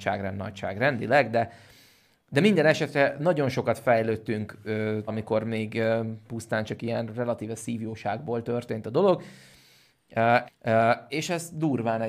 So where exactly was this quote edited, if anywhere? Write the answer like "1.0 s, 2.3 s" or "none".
5.1 s, 10.5 s